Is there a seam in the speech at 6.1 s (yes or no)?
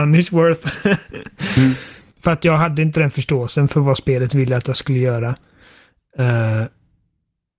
no